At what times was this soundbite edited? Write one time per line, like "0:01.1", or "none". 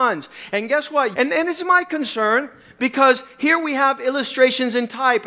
0:01.1